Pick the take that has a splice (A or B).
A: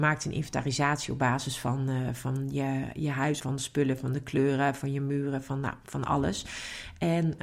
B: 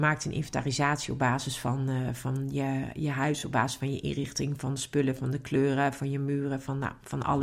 A